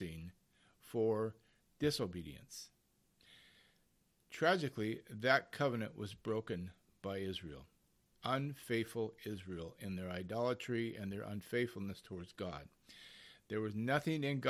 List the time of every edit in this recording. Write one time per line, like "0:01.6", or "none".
none